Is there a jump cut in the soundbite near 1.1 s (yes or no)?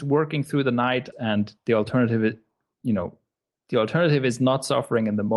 yes